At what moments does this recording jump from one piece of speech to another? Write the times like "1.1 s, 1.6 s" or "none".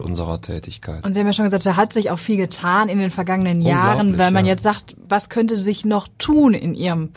5.1 s